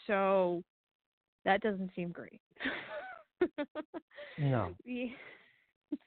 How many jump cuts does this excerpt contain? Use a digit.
0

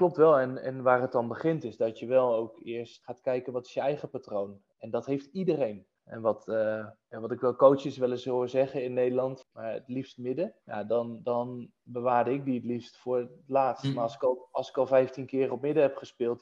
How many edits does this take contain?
2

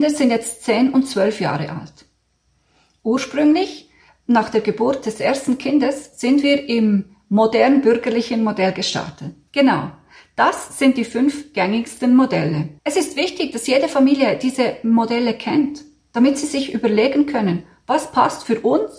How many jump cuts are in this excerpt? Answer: 2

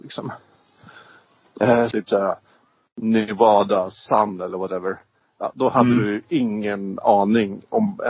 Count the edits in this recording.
1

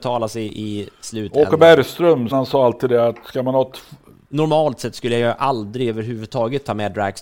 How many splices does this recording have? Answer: 2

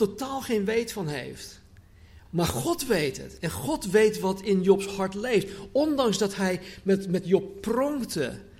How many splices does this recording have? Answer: 1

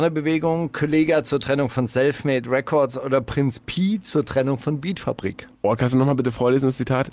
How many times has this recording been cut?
1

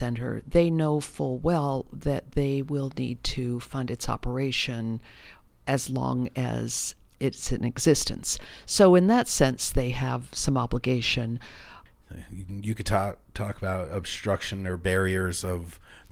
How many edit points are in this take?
0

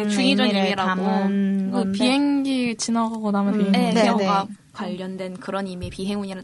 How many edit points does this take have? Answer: 2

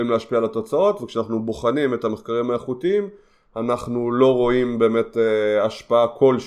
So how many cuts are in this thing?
0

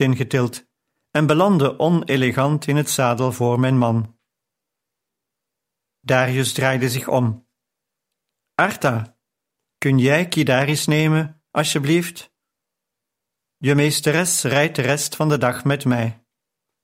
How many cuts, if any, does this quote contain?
0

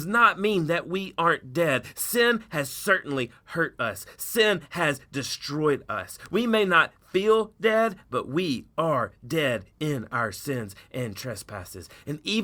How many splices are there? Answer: 0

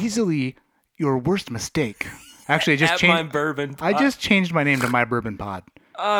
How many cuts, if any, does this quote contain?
1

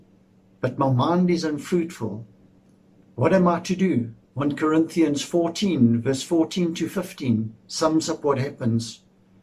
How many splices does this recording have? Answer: 1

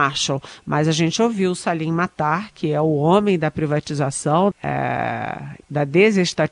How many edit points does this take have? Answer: 2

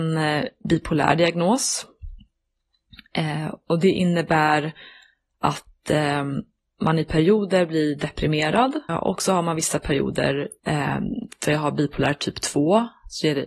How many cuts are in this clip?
2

